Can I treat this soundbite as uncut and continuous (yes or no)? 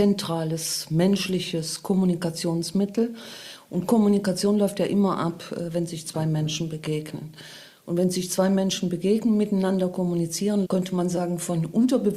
no